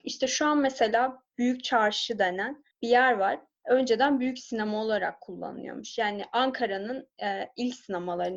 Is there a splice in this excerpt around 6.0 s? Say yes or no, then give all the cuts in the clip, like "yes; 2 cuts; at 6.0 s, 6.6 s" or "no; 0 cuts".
no; 1 cut; at 2.7 s